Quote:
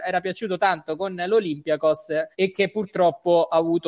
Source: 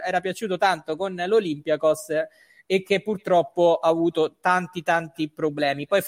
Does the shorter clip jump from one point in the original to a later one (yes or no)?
yes